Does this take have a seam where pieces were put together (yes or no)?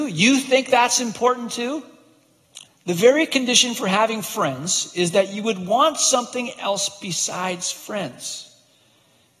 yes